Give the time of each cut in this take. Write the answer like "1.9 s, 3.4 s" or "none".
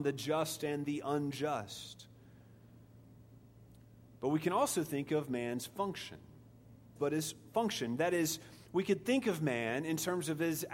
7.0 s